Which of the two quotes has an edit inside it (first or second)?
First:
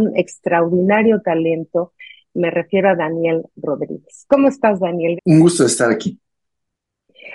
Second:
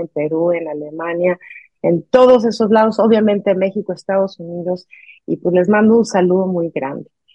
first